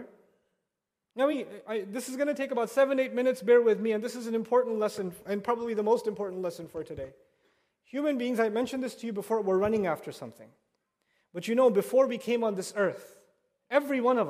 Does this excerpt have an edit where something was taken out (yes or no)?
no